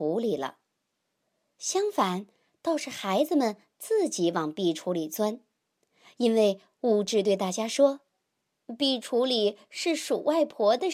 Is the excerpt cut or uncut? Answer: uncut